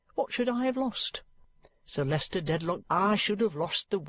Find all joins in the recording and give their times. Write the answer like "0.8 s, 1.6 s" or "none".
2.8 s